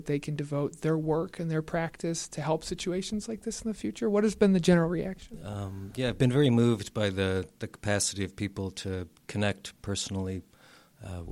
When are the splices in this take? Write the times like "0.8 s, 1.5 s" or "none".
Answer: none